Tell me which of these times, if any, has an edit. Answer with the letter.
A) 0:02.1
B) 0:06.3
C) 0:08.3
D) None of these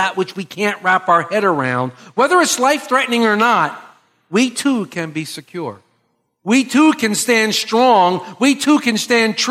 D